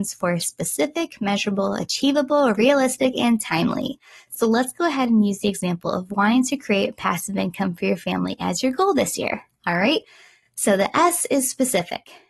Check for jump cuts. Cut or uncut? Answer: uncut